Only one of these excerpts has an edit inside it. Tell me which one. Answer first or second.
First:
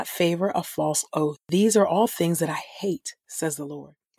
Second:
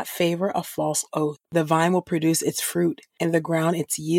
second